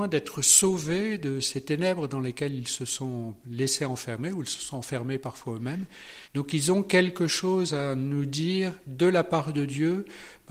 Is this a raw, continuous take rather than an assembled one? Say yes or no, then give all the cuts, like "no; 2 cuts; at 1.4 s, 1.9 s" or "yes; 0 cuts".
no; 1 cut; at 6.3 s